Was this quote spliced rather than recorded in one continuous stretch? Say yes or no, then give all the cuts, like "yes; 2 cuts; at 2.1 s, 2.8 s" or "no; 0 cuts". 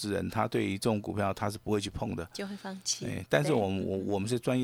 no; 0 cuts